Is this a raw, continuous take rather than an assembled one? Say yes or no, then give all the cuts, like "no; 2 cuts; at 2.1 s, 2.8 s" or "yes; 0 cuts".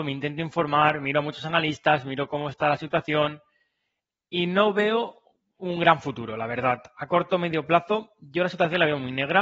yes; 0 cuts